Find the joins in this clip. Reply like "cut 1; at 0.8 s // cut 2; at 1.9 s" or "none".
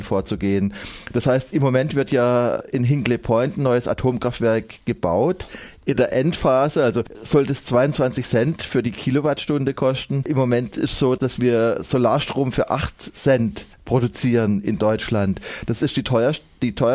cut 1; at 11.2 s